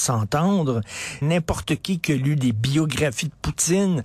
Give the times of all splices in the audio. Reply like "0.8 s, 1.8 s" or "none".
1.2 s